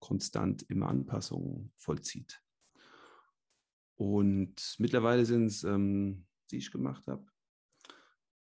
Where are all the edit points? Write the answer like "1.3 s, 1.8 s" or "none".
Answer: 1.7 s, 6.5 s